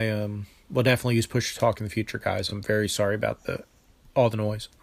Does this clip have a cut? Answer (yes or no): no